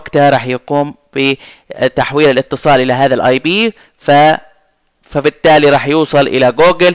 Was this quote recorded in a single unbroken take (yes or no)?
yes